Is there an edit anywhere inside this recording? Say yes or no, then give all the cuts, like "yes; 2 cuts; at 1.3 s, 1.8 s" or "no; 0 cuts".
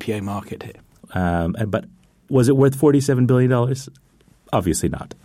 yes; 1 cut; at 1.0 s